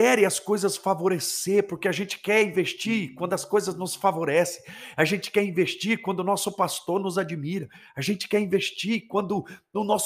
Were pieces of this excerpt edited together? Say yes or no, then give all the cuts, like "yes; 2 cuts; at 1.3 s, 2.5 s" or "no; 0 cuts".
no; 0 cuts